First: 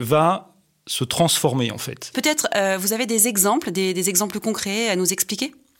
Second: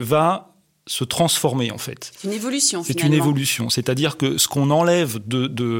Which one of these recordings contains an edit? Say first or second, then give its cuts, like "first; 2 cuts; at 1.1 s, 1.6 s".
first; 1 cut; at 2.1 s